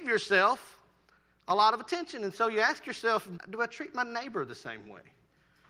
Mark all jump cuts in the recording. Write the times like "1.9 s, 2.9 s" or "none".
3.4 s